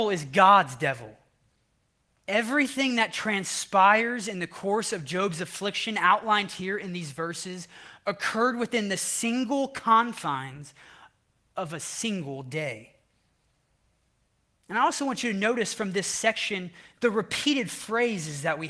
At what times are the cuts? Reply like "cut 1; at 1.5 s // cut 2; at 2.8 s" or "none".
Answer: cut 1; at 2.1 s